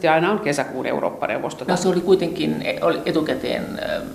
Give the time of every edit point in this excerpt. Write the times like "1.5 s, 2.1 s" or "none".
1.7 s